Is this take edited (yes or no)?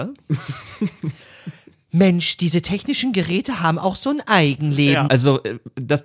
yes